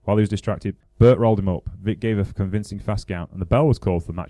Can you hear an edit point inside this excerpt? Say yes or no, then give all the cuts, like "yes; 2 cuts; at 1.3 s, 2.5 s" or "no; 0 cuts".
no; 0 cuts